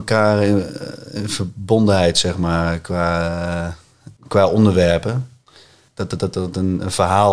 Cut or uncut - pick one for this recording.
cut